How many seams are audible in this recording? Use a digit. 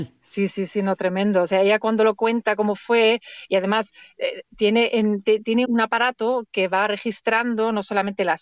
1